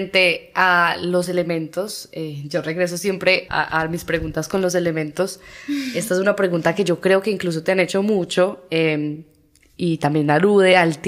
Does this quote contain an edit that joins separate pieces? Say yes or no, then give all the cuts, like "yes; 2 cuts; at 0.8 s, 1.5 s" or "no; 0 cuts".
yes; 1 cut; at 3.5 s